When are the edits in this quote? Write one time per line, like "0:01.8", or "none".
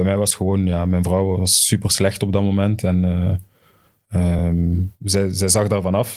none